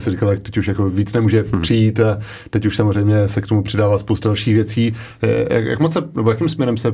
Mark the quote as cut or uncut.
uncut